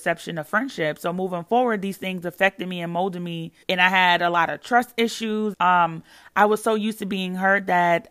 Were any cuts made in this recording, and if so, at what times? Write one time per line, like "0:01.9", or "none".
0:03.6
0:05.5